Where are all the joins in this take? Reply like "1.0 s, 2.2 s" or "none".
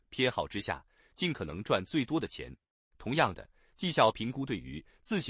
2.9 s